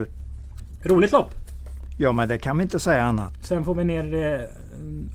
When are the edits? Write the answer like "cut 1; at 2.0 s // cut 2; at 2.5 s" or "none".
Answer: none